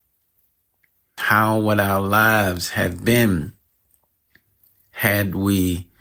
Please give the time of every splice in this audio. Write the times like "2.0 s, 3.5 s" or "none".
1.2 s

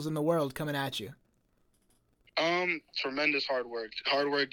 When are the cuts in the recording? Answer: none

